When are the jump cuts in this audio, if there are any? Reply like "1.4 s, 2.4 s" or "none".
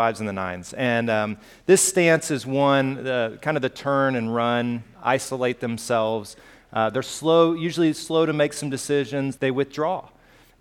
4.9 s, 9.4 s